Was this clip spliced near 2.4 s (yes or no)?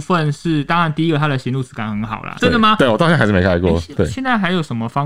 yes